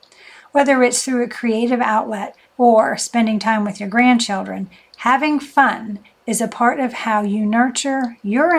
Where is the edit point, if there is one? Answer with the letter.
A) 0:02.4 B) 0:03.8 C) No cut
A